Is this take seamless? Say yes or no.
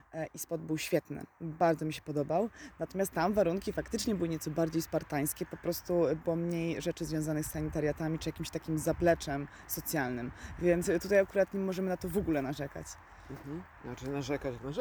yes